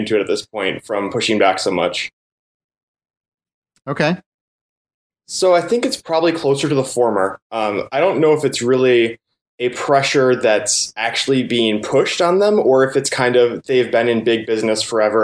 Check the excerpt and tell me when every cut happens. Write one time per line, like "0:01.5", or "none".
0:05.1

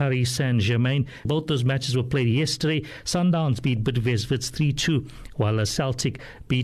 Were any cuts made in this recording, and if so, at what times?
0:01.3

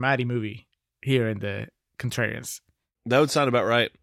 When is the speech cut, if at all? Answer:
none

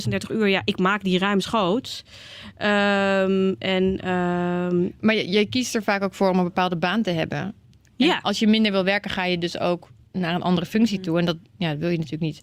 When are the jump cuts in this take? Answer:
none

